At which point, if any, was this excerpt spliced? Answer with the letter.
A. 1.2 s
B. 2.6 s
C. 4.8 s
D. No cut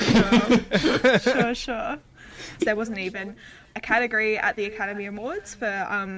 B